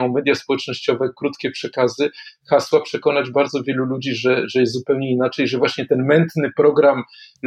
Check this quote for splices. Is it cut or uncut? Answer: uncut